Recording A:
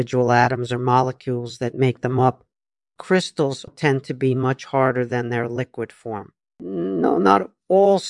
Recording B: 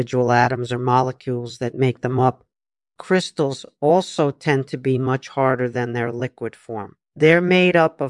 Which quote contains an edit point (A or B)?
A